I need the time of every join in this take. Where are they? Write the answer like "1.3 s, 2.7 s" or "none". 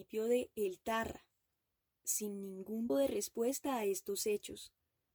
2.9 s